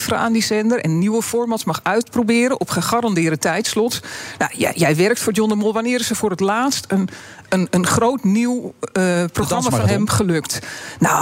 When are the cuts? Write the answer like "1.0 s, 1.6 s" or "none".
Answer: none